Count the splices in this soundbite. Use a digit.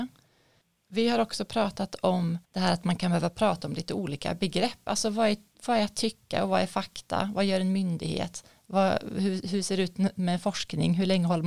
1